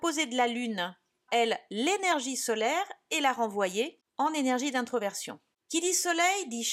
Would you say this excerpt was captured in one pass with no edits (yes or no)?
no